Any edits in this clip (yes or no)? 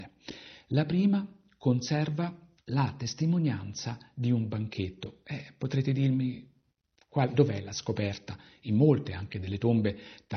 no